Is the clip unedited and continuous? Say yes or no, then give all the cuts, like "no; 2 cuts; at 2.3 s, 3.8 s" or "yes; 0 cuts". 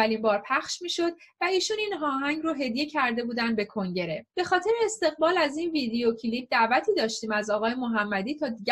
no; 1 cut; at 4.3 s